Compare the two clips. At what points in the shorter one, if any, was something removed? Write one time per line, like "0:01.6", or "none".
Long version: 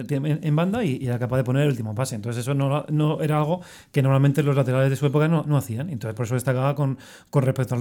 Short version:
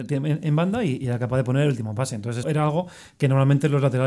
0:02.4